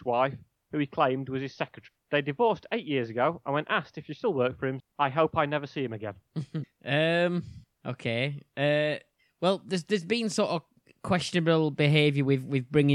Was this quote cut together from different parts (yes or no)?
yes